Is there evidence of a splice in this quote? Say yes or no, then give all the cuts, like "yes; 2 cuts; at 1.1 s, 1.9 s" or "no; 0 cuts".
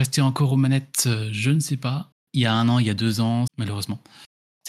yes; 2 cuts; at 2.1 s, 3.5 s